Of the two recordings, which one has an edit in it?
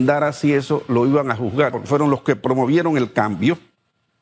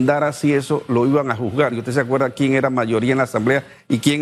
first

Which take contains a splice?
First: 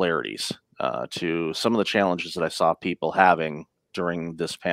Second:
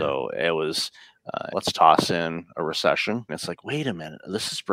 second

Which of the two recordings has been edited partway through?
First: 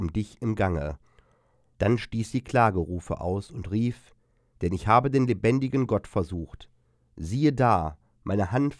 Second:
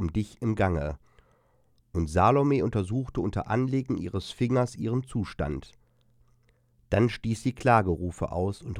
first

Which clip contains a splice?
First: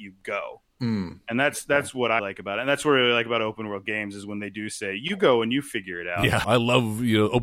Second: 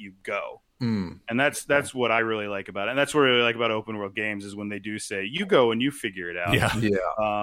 first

